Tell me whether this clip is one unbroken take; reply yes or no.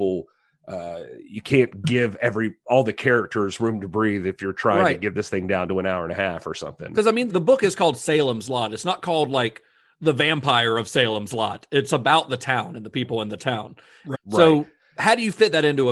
no